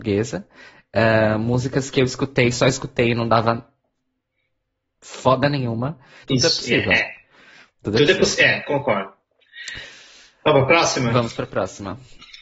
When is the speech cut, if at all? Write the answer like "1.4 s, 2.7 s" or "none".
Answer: 6.2 s

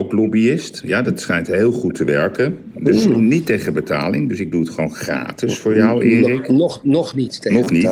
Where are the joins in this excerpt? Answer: 3.1 s

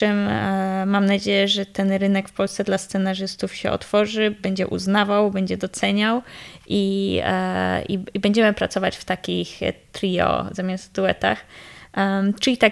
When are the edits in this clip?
none

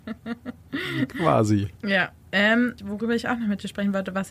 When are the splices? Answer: 2.8 s

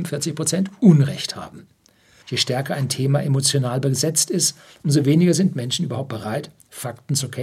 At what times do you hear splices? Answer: 2.2 s

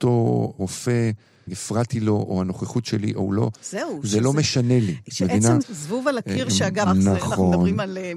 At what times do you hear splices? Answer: 5.6 s, 6.9 s

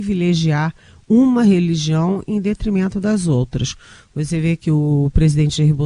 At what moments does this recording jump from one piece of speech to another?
none

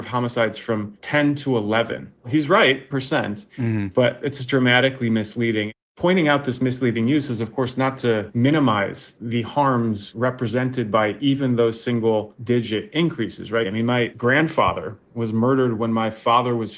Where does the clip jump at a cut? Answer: 2.9 s

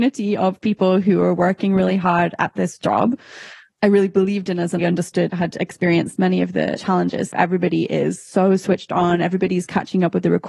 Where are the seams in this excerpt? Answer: 4.8 s, 7.3 s

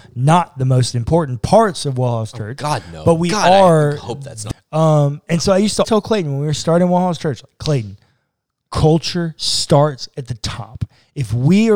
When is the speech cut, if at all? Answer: 4.5 s, 5.8 s

